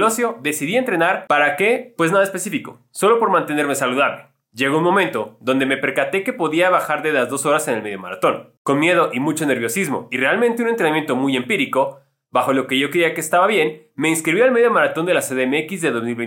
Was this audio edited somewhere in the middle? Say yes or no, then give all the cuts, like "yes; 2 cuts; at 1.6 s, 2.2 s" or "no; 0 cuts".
no; 0 cuts